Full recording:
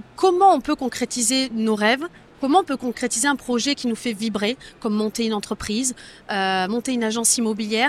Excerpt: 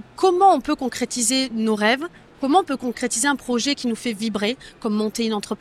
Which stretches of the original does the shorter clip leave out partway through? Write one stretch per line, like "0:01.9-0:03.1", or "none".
none